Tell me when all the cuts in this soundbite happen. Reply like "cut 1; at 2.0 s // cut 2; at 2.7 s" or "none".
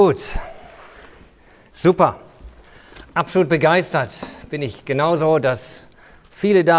none